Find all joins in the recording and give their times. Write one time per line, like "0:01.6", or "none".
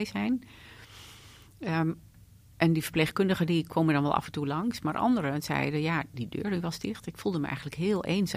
none